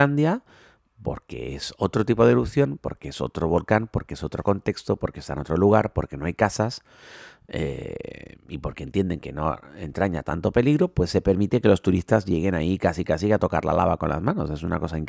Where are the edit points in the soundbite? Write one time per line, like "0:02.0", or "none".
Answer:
none